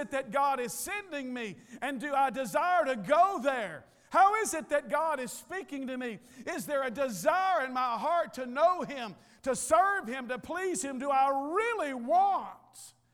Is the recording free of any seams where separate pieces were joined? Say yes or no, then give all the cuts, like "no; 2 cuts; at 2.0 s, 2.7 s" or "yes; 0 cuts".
yes; 0 cuts